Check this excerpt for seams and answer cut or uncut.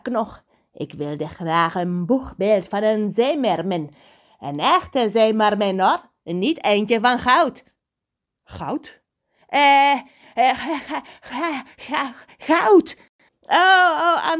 cut